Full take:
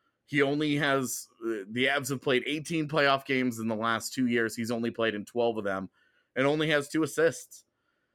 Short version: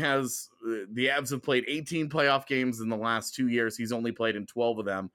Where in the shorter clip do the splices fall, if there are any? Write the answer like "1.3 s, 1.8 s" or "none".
none